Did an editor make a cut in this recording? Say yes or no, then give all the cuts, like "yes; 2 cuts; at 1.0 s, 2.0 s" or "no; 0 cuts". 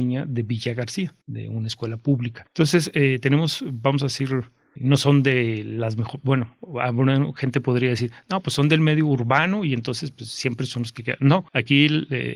no; 0 cuts